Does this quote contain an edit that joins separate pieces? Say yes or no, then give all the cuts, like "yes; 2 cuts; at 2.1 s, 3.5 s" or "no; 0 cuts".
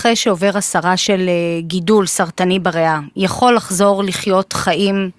no; 0 cuts